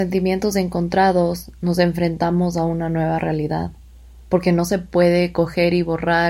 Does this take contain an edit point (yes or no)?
yes